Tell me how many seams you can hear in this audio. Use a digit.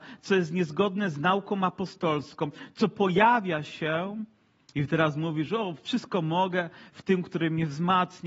1